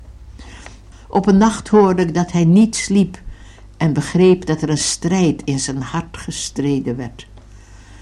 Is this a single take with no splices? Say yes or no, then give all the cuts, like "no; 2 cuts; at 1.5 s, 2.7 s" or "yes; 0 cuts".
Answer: no; 1 cut; at 0.9 s